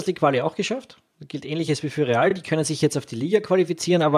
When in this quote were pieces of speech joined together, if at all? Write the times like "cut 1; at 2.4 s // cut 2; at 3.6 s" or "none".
none